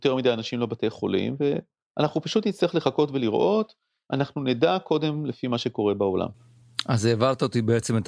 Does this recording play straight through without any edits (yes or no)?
yes